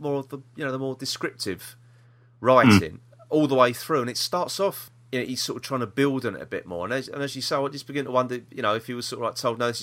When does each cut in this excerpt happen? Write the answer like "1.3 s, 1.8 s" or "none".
none

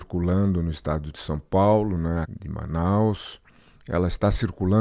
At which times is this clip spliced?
2.2 s

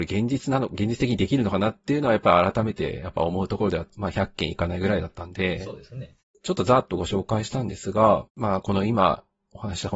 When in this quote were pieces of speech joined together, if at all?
3.9 s, 6.2 s, 8.3 s

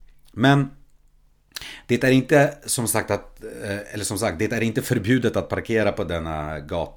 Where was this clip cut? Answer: none

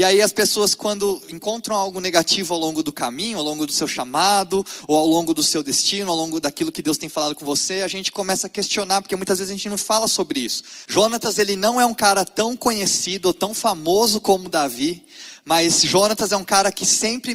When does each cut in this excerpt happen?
10.9 s

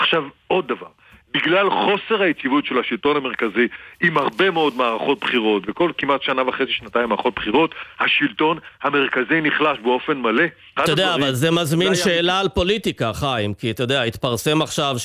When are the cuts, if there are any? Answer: 10.8 s

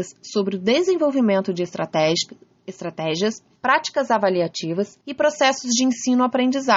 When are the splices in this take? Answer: 3.6 s, 5.0 s

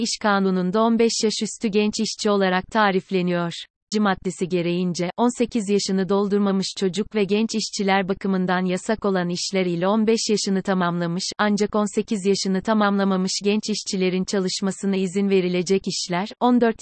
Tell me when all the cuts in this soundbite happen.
3.9 s

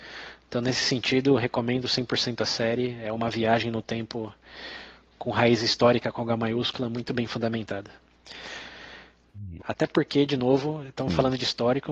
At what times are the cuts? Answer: 9.6 s

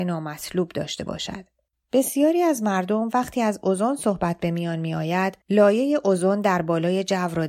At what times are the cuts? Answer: 1.7 s, 5.4 s

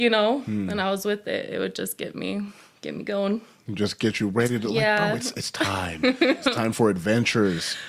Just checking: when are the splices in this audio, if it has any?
none

